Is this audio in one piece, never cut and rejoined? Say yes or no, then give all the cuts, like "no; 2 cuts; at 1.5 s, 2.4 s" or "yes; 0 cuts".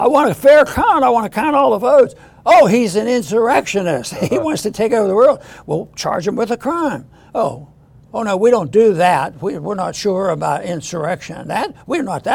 yes; 0 cuts